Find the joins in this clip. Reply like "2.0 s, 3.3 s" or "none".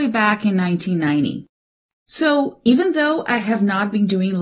none